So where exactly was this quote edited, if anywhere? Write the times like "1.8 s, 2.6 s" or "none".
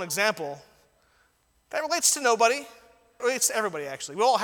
3.2 s